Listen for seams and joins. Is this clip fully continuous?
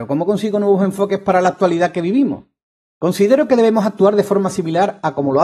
yes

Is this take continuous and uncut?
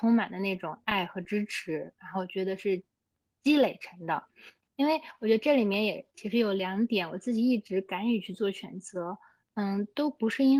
yes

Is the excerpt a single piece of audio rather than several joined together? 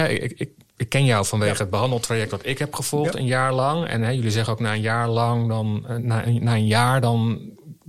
yes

